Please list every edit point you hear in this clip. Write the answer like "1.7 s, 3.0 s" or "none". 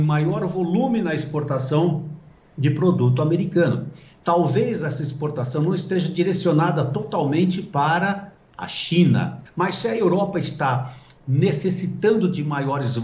9.5 s